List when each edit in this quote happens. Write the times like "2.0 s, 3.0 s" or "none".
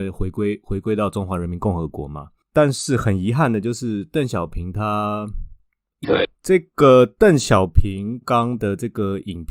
6.0 s, 8.2 s